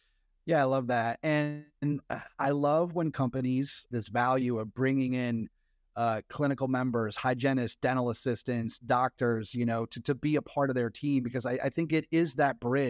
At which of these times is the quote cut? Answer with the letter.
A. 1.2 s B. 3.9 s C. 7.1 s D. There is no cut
B